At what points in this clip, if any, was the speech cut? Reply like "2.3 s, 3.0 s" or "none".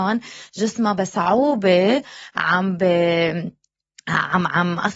none